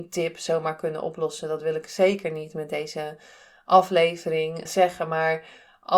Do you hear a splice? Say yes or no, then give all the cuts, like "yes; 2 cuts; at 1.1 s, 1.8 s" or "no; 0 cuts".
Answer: yes; 1 cut; at 4.7 s